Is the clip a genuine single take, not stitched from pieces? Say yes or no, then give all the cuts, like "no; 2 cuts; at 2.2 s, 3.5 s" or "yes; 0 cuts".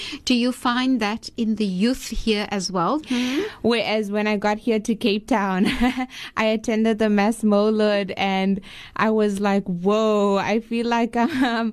no; 1 cut; at 3.0 s